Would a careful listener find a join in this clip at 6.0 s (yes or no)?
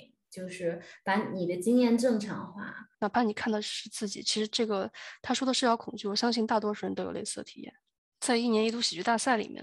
no